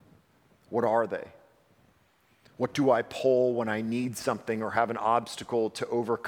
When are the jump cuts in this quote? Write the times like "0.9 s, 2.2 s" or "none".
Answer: none